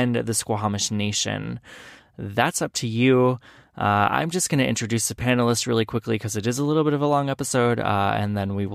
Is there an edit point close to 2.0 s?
yes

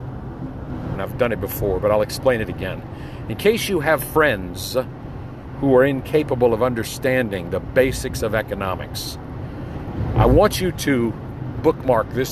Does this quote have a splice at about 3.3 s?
no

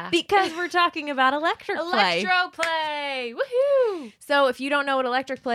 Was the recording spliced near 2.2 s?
no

